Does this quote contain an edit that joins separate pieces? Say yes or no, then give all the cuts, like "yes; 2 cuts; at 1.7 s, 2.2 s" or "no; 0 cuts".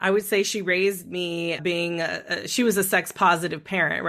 yes; 1 cut; at 1.6 s